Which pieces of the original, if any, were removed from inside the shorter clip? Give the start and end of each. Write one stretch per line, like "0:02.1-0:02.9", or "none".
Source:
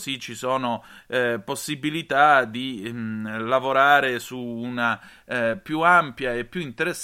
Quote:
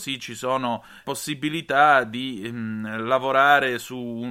0:01.0-0:01.4